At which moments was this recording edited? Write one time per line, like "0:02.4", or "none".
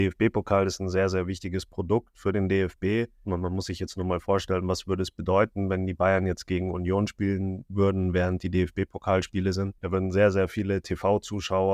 0:03.3
0:09.8